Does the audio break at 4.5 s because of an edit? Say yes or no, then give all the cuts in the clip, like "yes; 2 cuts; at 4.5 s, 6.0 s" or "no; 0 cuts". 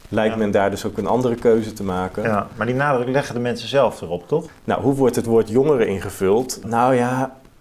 yes; 2 cuts; at 4.5 s, 6.6 s